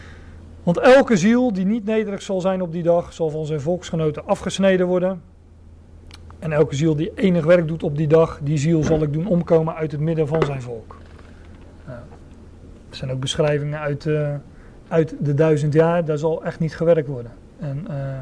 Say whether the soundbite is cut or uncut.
uncut